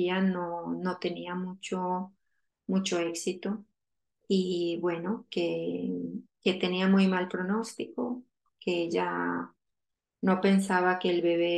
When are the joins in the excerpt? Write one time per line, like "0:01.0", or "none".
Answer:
0:04.2
0:06.4